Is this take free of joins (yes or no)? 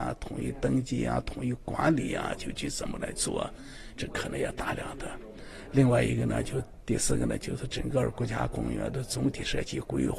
yes